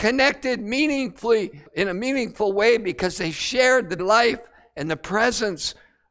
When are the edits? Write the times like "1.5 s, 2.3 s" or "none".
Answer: 1.7 s, 4.0 s